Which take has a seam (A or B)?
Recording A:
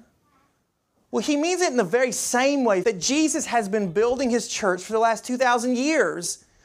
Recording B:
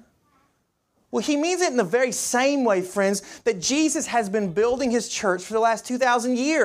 A